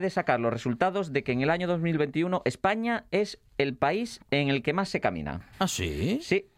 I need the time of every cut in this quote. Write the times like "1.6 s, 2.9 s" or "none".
5.5 s

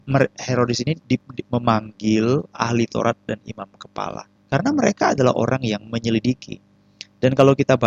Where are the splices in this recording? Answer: 1.4 s, 4.4 s

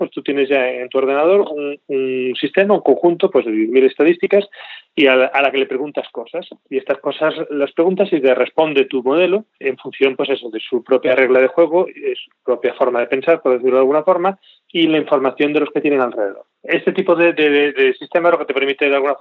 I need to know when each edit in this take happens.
9.5 s, 17.7 s

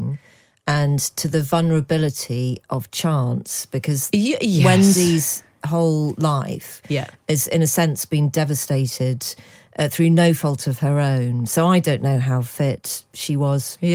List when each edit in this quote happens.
none

